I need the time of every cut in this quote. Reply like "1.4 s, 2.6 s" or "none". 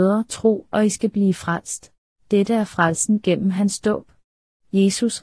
2.2 s